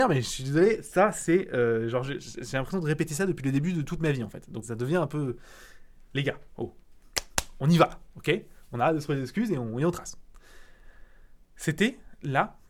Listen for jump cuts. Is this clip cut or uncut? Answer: cut